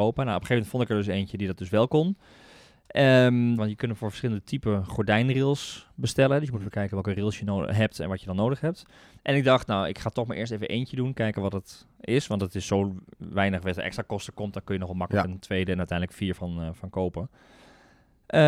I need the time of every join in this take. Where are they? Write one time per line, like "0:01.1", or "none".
0:03.6